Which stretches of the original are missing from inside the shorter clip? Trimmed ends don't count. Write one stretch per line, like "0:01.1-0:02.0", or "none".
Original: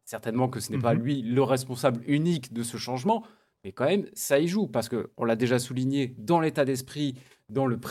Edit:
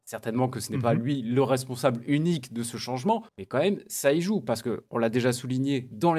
0:03.3-0:03.5